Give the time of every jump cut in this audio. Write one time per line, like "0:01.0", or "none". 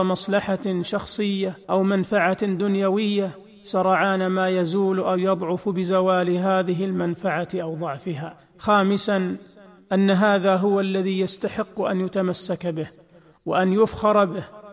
0:01.6